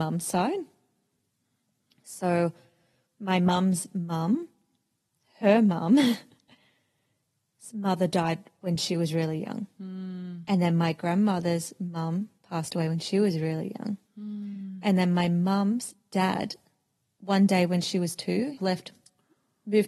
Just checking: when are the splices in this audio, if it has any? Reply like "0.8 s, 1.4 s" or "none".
18.6 s

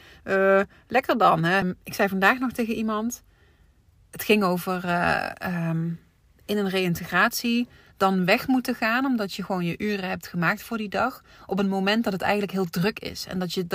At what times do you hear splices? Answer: 1.6 s

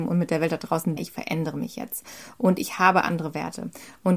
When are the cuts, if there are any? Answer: 1.0 s

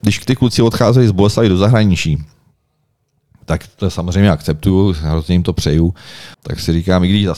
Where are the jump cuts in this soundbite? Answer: 6.3 s

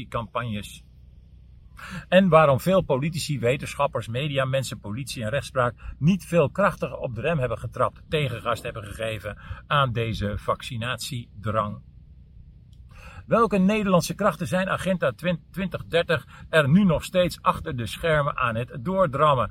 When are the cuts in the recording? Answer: none

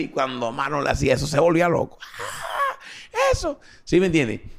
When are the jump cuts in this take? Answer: none

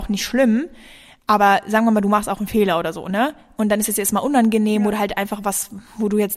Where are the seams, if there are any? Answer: none

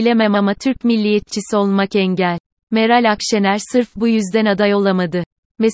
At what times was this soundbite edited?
none

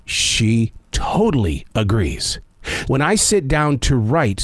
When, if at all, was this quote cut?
2.8 s

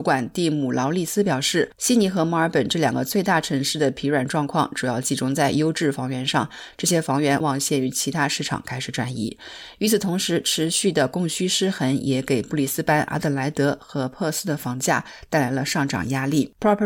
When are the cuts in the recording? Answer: 7.4 s

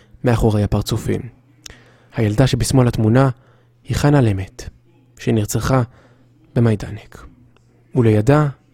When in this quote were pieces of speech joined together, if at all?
2.1 s

